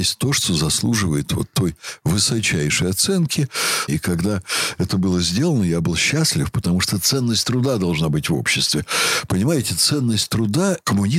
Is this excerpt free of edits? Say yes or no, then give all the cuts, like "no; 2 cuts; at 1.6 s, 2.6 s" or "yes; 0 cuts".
no; 1 cut; at 3.9 s